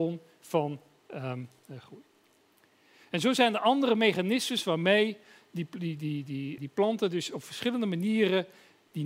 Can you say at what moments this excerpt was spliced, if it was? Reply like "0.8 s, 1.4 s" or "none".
6.6 s